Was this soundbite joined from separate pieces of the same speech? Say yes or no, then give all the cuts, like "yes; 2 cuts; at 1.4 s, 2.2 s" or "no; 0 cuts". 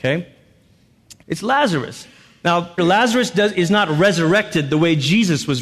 yes; 2 cuts; at 1.2 s, 2.8 s